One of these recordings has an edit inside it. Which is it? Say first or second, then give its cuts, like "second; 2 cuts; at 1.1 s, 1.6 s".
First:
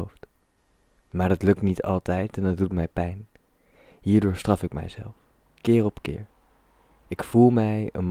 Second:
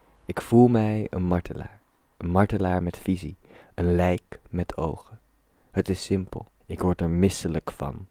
second; 1 cut; at 6.6 s